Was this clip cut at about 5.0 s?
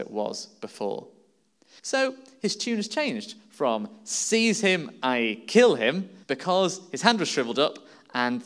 no; 2 cuts; at 1.8 s, 6.2 s

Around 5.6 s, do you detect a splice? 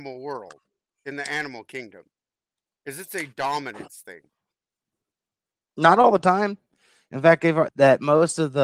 no; 1 cut; at 7.7 s

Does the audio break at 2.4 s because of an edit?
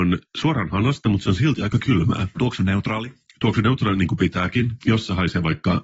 yes; 2 cuts; at 2.4 s, 4.8 s

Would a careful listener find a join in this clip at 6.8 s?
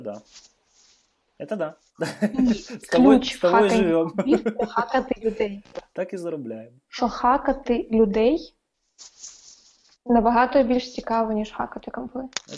yes; 1 cut; at 6.8 s

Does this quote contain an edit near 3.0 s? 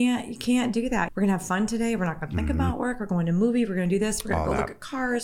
no; 1 cut; at 1.1 s

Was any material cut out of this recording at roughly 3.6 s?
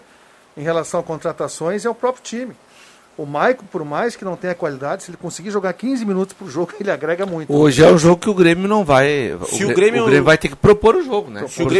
no; 0 cuts

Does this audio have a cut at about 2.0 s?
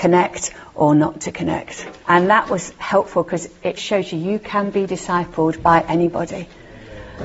yes; 2 cuts; at 2.0 s, 3.8 s

